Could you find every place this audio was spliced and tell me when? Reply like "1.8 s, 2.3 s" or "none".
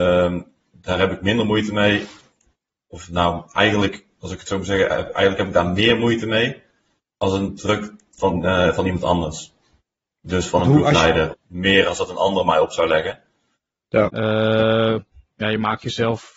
11.3 s, 14.1 s